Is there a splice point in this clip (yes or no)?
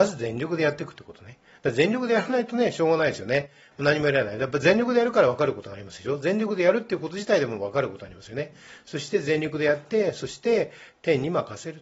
no